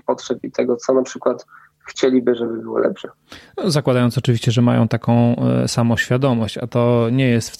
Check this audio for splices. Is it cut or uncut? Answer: uncut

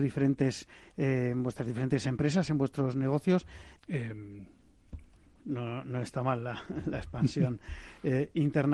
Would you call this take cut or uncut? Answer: cut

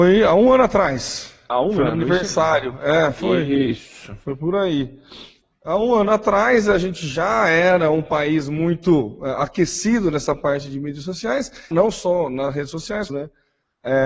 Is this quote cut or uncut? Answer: cut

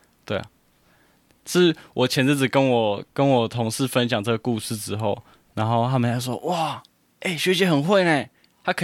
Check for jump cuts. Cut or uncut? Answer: uncut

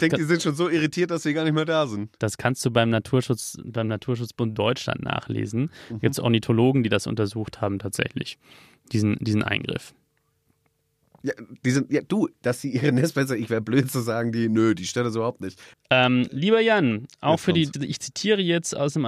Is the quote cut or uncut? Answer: cut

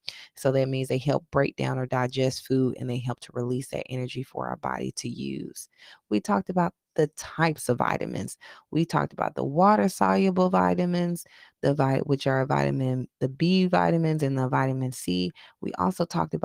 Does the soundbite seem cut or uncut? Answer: uncut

